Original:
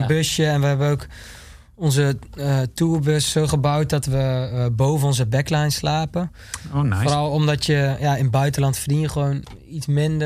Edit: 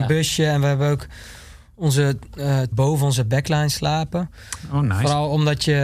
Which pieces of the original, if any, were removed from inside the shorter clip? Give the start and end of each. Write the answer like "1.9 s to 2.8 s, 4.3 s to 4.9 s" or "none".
2.7 s to 4.7 s